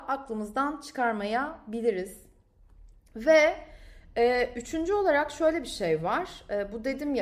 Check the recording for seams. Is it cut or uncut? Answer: uncut